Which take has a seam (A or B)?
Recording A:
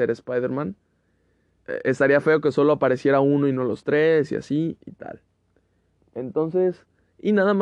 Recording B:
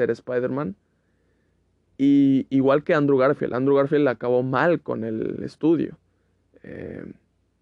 A